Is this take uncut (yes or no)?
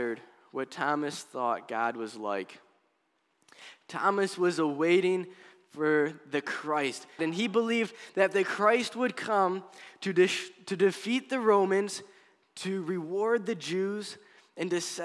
no